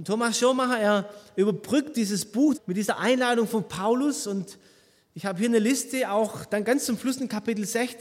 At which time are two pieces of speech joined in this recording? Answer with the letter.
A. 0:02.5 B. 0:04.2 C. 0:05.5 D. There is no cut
A